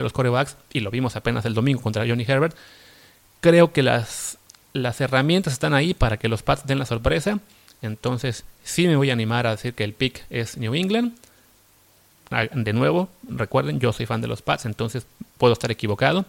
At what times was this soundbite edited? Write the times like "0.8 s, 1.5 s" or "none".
none